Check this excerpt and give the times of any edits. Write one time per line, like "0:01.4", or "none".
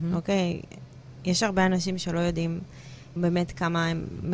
0:03.2